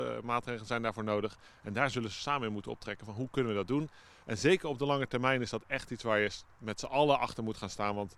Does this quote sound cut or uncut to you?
uncut